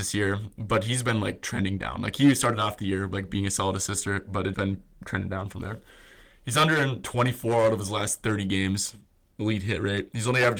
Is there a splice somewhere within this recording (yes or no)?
yes